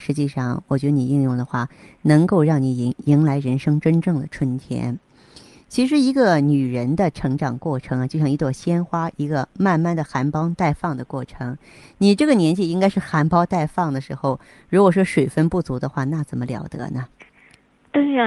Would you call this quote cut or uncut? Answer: uncut